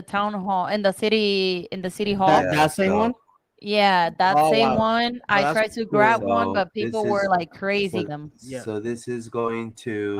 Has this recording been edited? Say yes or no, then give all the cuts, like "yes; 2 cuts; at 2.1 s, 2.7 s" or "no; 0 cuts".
yes; 1 cut; at 8.1 s